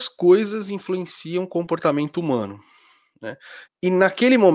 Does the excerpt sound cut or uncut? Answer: cut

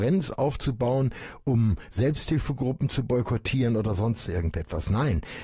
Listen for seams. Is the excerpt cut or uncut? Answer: uncut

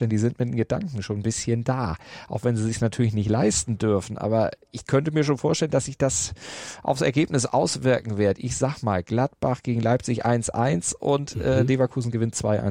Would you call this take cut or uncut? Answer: uncut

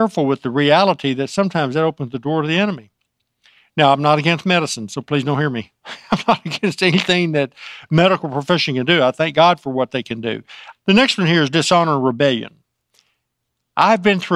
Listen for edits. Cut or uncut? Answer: cut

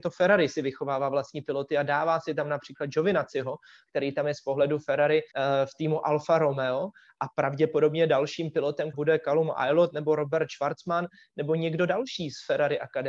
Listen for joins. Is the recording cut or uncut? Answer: cut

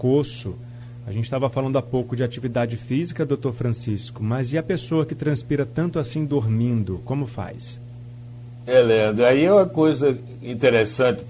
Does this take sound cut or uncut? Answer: uncut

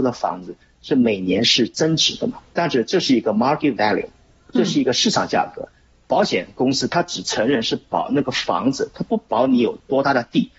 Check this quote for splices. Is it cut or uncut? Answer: uncut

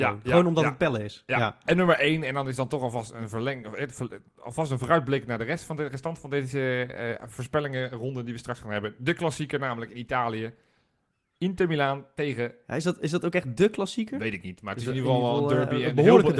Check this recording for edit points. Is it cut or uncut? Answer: uncut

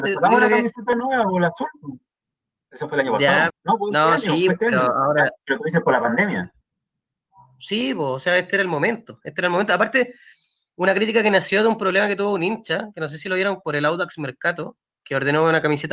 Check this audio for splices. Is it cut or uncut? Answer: cut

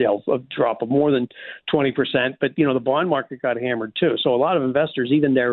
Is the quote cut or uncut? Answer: uncut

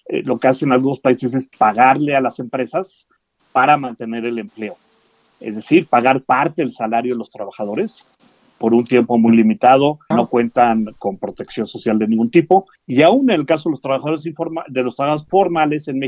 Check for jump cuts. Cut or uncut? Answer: cut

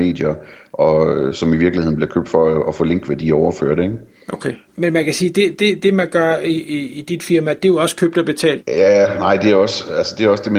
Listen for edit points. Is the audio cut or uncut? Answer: cut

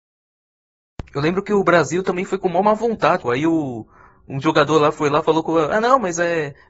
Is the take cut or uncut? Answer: cut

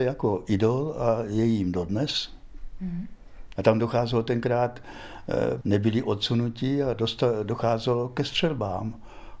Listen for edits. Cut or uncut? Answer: cut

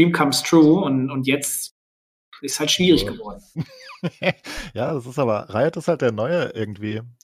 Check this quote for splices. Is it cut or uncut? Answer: uncut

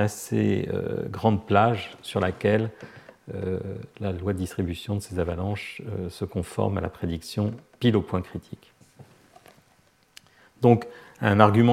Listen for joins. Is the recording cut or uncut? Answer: uncut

